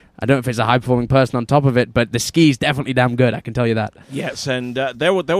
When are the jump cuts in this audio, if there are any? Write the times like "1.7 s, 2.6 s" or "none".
none